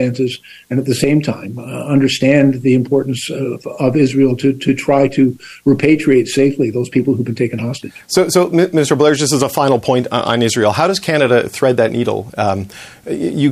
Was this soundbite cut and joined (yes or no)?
no